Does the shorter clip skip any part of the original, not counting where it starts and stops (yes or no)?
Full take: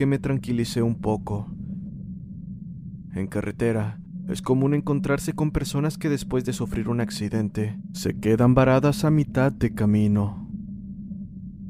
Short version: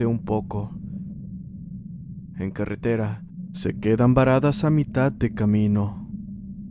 yes